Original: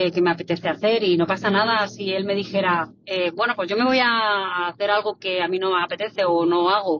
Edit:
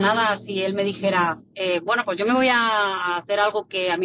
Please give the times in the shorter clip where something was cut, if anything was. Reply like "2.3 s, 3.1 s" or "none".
none